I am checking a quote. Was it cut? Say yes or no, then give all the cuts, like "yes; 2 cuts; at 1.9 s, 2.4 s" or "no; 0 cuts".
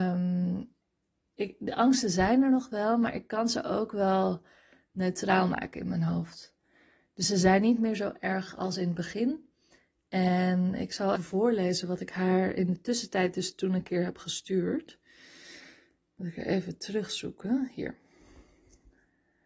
yes; 1 cut; at 11.2 s